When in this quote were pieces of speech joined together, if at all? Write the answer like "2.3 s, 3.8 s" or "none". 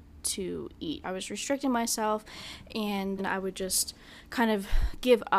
1.0 s, 3.2 s